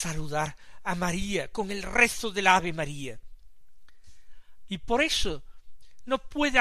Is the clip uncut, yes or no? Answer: no